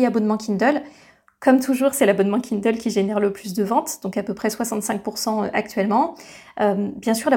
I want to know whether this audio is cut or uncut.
uncut